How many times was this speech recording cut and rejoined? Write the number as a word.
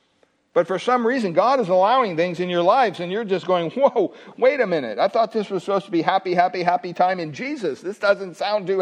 zero